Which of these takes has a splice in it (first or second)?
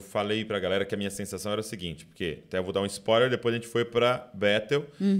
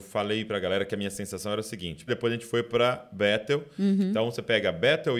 second